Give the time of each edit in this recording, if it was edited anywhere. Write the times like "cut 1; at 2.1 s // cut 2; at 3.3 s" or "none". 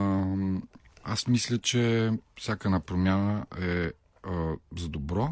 none